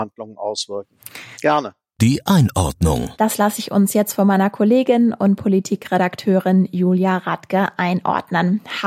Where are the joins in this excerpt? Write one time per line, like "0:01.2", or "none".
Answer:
0:01.3
0:03.1